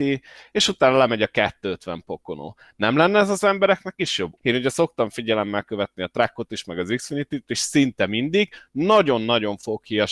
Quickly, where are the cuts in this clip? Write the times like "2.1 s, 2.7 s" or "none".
4.4 s